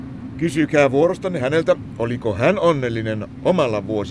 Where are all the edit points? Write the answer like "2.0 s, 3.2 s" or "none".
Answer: none